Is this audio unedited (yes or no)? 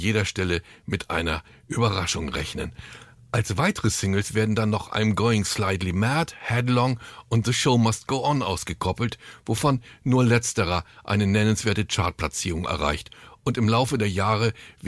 yes